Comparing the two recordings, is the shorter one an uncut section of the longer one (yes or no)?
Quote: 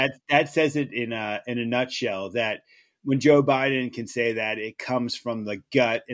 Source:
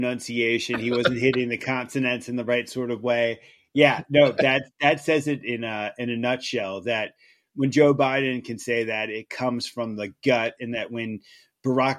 yes